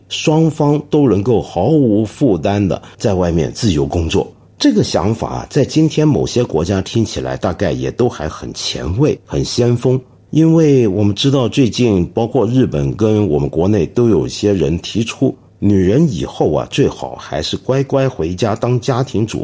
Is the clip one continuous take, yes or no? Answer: no